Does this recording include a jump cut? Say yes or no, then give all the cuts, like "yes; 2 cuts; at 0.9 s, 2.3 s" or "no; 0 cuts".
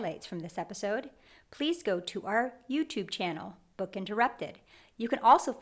no; 0 cuts